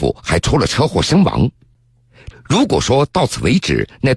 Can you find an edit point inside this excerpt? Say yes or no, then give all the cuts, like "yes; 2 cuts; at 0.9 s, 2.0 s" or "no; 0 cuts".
yes; 1 cut; at 2.3 s